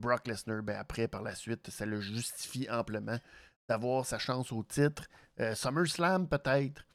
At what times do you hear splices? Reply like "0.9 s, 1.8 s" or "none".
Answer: none